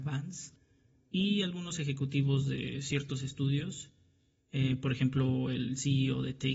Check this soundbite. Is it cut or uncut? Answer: uncut